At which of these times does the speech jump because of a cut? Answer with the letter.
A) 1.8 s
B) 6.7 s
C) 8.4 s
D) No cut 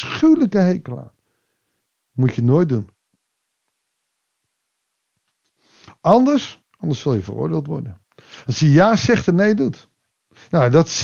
B